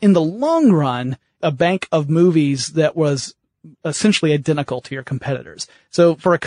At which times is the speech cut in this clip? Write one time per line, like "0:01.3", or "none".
0:01.4